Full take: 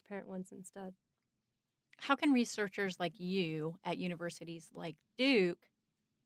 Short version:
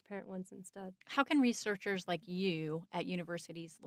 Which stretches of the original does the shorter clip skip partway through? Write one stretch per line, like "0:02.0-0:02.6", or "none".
0:01.0-0:01.9